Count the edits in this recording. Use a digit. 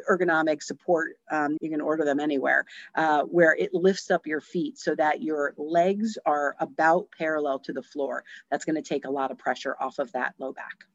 1